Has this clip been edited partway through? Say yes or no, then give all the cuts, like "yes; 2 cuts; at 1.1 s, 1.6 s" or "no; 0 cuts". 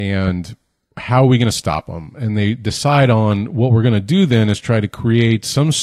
no; 0 cuts